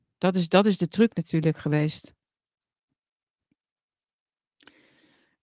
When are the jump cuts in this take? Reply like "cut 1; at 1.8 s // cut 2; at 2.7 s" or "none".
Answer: none